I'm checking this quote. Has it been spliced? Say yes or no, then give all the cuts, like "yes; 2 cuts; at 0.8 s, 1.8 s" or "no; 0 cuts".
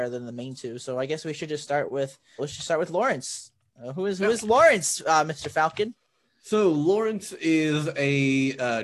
yes; 1 cut; at 2.4 s